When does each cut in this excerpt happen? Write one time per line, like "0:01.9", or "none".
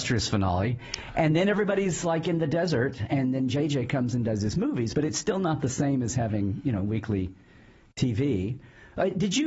none